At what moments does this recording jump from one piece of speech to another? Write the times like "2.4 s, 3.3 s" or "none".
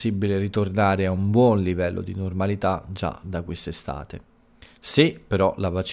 none